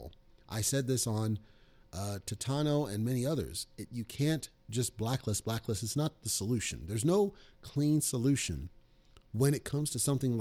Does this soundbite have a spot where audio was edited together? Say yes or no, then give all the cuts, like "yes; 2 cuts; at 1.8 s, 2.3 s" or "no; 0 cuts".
no; 0 cuts